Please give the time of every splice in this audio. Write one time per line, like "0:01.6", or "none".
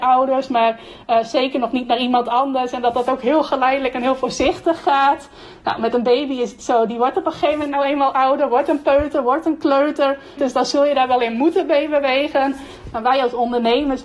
0:10.4